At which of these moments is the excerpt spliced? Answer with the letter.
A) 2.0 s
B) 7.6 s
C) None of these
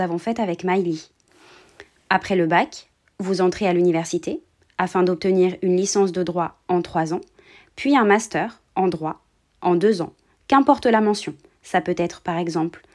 C